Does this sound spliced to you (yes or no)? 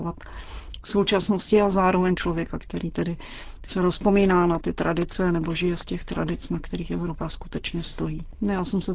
yes